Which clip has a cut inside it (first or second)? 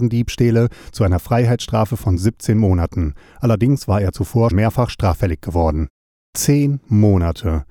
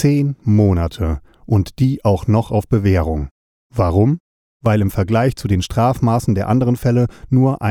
first